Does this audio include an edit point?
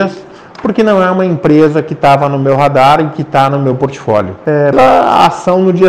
yes; 1 cut; at 4.7 s

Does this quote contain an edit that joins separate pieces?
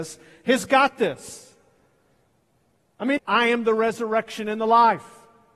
yes; 1 cut; at 3.2 s

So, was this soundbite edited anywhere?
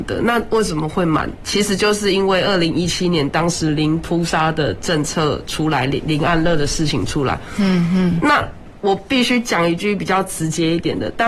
no; 0 cuts

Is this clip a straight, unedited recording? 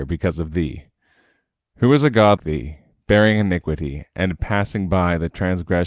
no; 1 cut; at 2.4 s

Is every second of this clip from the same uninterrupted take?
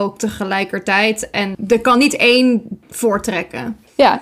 yes; 0 cuts

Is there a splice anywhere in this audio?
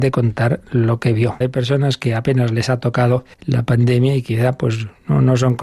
yes; 2 cuts; at 1.4 s, 3.3 s

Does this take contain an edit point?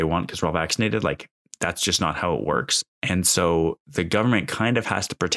yes; 1 cut; at 2.9 s

